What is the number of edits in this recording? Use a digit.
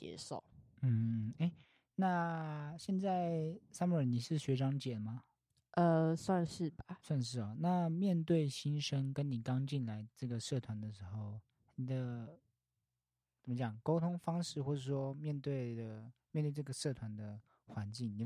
0